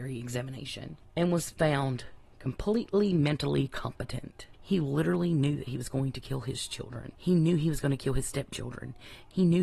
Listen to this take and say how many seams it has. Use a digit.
1